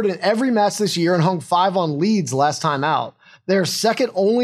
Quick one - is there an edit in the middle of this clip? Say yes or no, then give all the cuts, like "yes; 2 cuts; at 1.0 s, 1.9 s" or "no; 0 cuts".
no; 0 cuts